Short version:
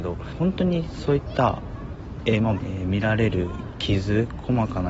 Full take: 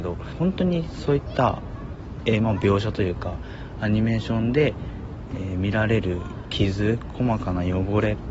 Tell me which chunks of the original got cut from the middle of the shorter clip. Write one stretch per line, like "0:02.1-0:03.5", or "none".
0:02.6-0:05.3